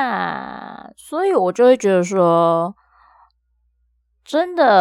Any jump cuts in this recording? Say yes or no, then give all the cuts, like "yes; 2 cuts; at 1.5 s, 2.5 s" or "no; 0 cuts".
no; 0 cuts